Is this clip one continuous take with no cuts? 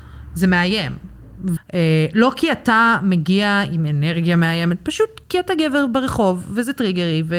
no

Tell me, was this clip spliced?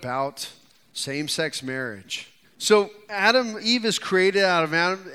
yes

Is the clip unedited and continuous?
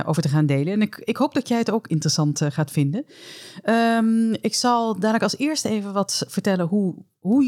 yes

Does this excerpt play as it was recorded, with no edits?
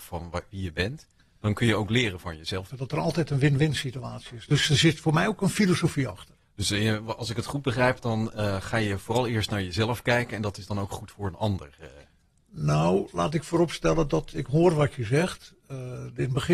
no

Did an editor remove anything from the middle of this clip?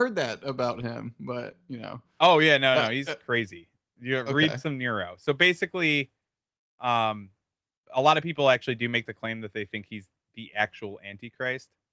no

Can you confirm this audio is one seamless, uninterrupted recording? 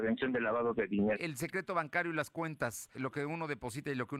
no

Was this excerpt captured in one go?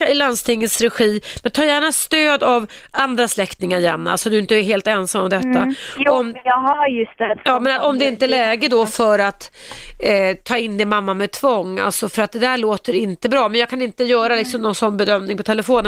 yes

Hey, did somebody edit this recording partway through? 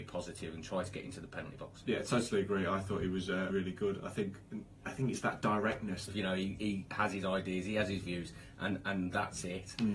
yes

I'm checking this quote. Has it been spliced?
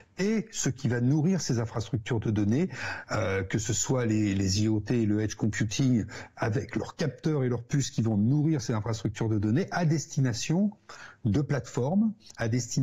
no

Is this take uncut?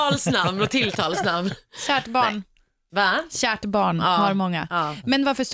yes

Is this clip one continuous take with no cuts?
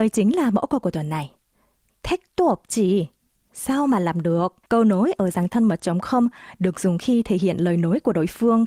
no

